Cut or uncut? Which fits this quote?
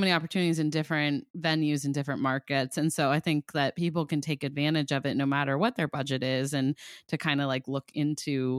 uncut